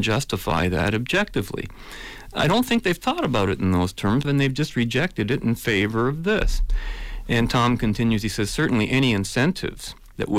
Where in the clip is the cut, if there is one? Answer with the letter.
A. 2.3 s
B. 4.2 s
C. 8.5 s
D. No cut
B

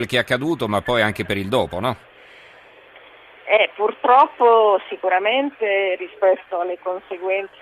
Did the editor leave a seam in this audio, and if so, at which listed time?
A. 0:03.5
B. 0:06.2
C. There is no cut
C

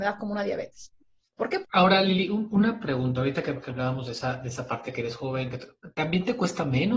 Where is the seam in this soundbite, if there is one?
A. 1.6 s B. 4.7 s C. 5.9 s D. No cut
A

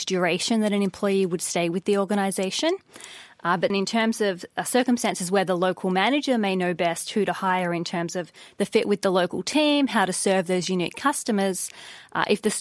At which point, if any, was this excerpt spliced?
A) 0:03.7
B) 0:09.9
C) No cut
A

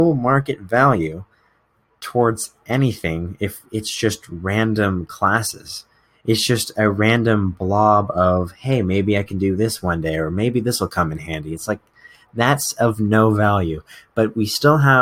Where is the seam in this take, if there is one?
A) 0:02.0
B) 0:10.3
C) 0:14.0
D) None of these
D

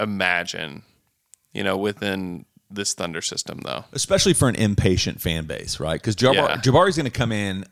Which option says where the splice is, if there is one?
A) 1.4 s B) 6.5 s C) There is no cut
C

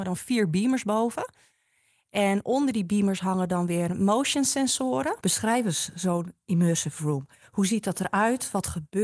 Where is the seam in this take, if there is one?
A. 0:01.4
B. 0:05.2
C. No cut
B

